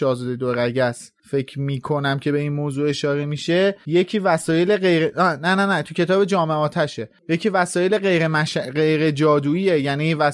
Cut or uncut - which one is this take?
uncut